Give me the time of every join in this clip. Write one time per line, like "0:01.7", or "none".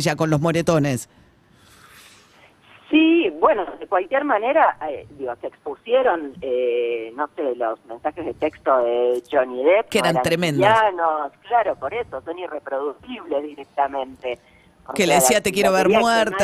none